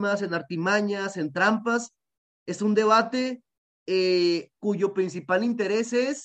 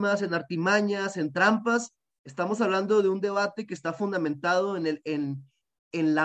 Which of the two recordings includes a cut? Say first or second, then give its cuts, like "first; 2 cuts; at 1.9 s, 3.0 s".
second; 1 cut; at 2.1 s